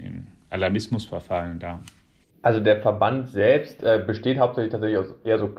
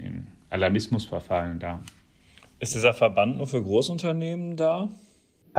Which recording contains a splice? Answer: first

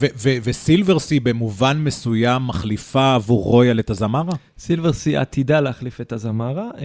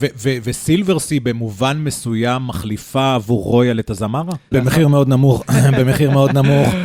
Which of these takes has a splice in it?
second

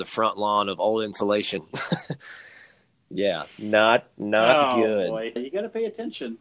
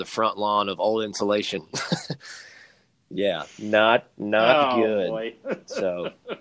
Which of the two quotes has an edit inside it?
first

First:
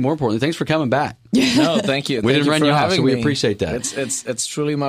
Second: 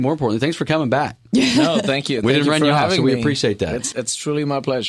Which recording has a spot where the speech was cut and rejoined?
second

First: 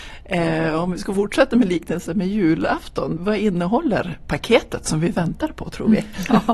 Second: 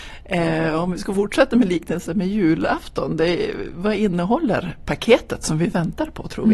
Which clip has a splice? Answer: first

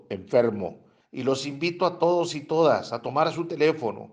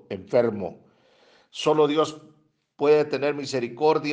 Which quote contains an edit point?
first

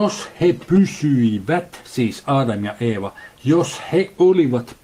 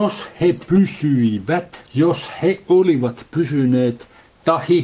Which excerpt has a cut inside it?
second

